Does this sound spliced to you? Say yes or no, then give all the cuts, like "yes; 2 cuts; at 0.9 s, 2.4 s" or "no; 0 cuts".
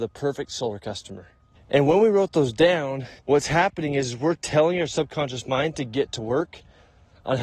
yes; 2 cuts; at 1.6 s, 3.2 s